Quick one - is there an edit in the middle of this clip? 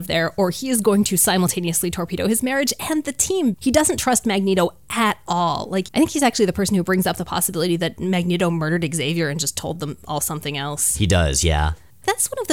no; 0 cuts

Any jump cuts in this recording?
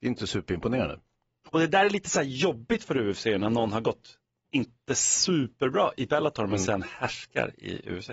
yes; 1 cut; at 1.5 s

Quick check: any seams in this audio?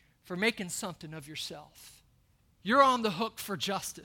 yes; 1 cut; at 2.6 s

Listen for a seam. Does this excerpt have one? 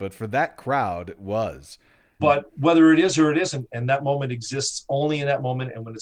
yes; 2 cuts; at 2.2 s, 3.7 s

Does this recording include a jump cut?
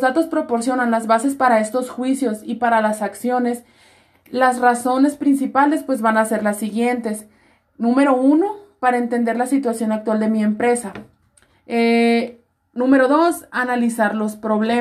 no; 0 cuts

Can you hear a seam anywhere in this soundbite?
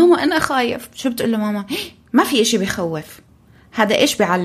no; 0 cuts

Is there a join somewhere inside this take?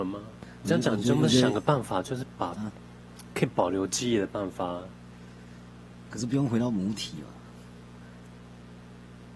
no; 0 cuts

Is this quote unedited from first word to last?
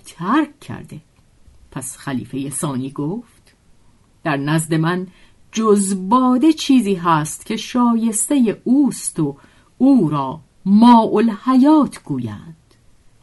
yes; 0 cuts

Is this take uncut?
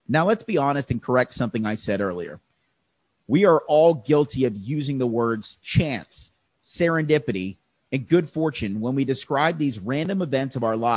no; 1 cut; at 6.5 s

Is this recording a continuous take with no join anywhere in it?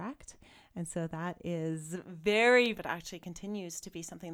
no; 1 cut; at 2.7 s

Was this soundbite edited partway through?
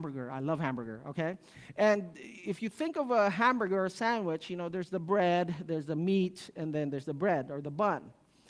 no; 0 cuts

